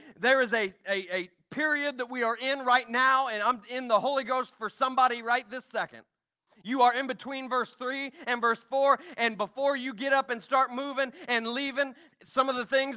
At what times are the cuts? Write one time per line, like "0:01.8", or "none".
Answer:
none